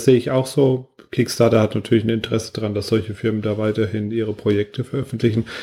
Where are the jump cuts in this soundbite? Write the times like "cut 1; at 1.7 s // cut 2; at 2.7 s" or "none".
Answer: none